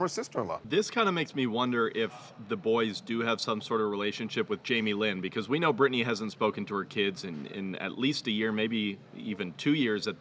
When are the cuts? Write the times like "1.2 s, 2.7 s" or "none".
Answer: none